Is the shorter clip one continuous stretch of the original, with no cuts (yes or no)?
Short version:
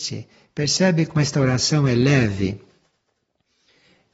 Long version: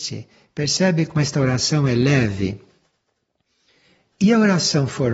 yes